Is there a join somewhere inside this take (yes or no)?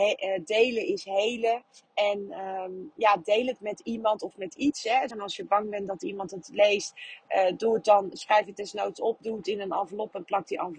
yes